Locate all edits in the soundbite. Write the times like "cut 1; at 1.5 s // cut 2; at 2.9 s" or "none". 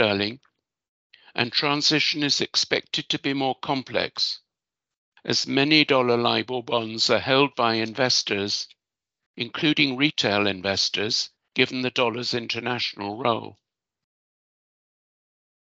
cut 1; at 11.4 s

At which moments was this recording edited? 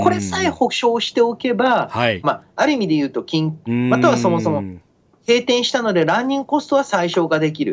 cut 1; at 2.2 s // cut 2; at 3.7 s

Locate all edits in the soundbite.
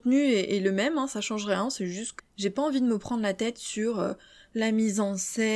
cut 1; at 2.2 s

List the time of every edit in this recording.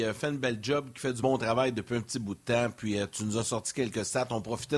none

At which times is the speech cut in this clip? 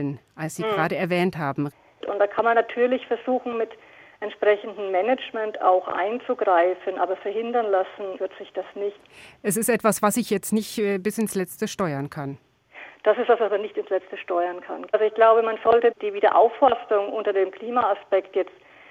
cut 1; at 2.0 s

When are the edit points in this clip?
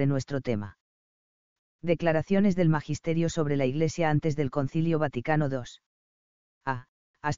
cut 1; at 1.6 s

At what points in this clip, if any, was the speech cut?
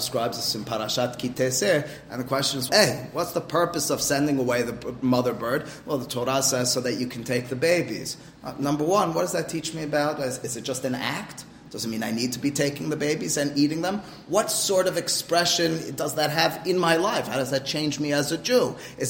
cut 1; at 2.7 s

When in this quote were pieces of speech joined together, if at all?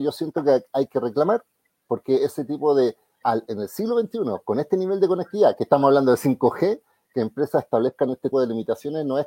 cut 1; at 3.2 s // cut 2; at 8.3 s

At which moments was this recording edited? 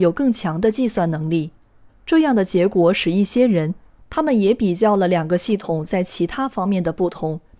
cut 1; at 1.9 s // cut 2; at 4.0 s

